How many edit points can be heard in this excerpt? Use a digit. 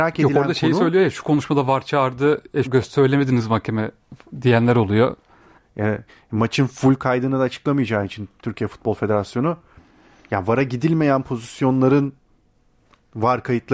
3